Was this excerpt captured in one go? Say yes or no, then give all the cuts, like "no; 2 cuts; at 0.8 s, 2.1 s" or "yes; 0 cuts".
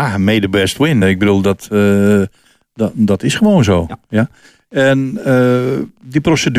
yes; 0 cuts